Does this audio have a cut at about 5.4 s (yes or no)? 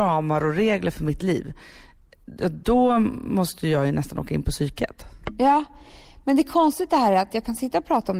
no